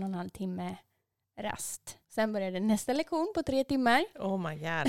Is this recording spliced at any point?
yes; 1 cut; at 2.0 s

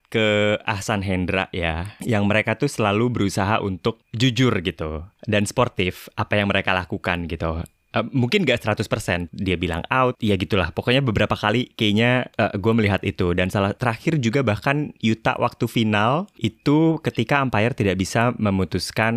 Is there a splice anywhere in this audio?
yes; 1 cut; at 9.3 s

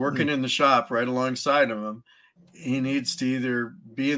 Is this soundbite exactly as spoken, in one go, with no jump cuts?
no; 1 cut; at 2.4 s

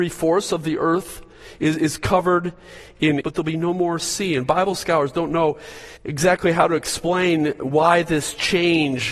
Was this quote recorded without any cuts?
no; 2 cuts; at 3.2 s, 6.0 s

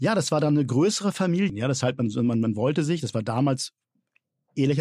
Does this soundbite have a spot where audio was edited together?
yes; 1 cut; at 1.5 s

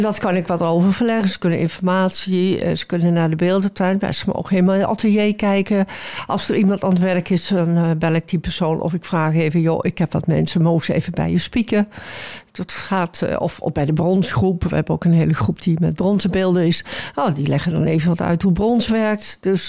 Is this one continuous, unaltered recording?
yes; 0 cuts

